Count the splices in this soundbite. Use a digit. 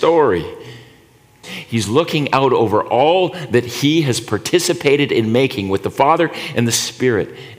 1